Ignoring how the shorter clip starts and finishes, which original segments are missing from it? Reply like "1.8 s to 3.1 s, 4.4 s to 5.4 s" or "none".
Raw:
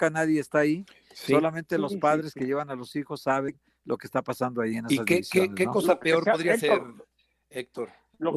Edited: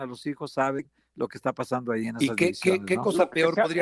none